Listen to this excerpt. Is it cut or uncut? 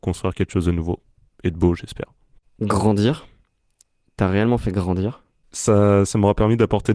uncut